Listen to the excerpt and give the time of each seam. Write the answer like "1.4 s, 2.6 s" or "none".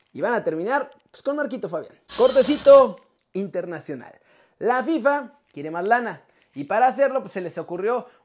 none